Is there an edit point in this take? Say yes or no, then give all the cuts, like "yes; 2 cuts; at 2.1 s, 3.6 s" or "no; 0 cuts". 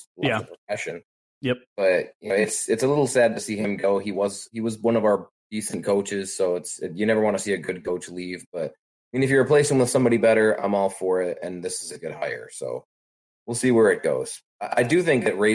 no; 0 cuts